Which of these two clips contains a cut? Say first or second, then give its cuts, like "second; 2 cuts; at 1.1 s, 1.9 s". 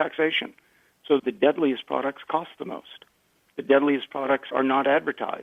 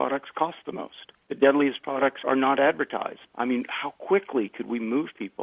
second; 2 cuts; at 1.2 s, 3.2 s